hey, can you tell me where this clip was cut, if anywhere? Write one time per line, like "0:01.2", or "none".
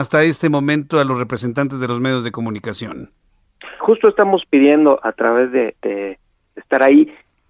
0:03.8